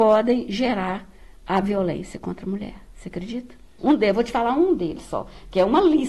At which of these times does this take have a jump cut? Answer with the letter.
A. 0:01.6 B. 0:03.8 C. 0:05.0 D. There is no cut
B